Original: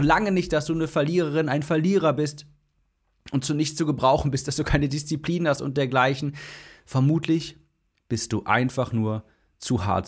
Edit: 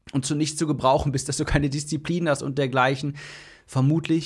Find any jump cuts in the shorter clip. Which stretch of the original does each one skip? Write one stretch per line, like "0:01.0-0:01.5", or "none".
none